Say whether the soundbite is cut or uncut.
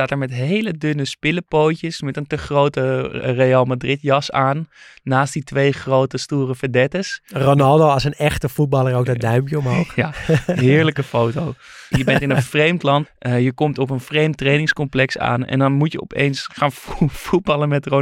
cut